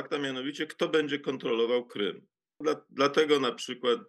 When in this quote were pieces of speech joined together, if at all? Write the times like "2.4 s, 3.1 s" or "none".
2.6 s